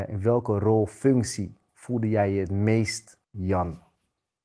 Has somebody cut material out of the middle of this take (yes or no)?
yes